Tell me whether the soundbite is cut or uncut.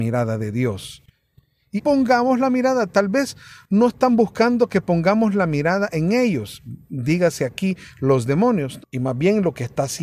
cut